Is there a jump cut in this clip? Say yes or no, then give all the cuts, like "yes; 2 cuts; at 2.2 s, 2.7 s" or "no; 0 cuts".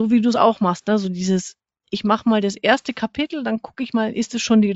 no; 0 cuts